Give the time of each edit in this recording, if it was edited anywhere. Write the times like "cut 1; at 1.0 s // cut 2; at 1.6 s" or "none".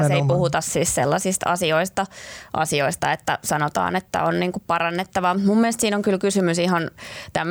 none

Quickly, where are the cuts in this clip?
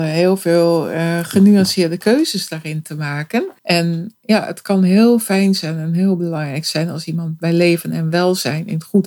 cut 1; at 3.6 s

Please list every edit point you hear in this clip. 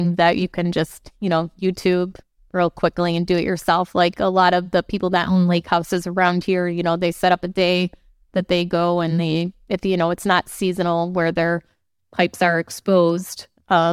none

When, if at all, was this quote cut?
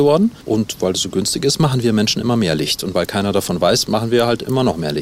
cut 1; at 3.9 s

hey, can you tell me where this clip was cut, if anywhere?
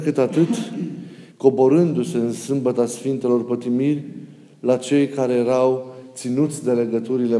cut 1; at 1.3 s

